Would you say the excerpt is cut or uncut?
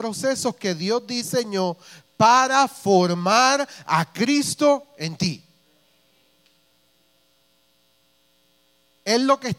uncut